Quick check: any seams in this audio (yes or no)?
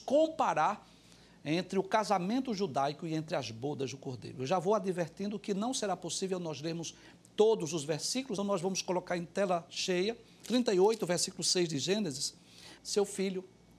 yes